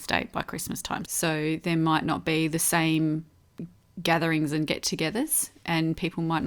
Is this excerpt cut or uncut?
cut